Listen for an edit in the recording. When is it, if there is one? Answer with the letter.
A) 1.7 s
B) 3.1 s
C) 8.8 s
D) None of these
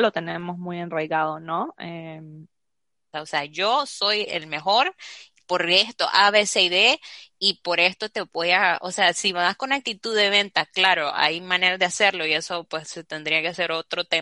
B